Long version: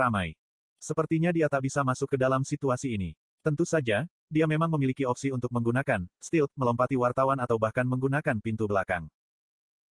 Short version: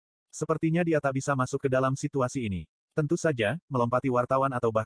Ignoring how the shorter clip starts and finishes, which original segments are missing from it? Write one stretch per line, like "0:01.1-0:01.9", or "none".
0:04.1-0:06.5